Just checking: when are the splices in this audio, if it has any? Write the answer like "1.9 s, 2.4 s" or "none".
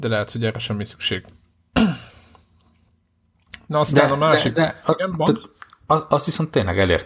none